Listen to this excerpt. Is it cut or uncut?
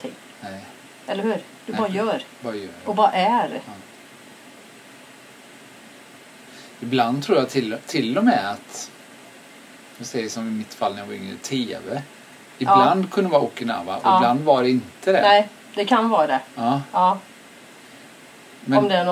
uncut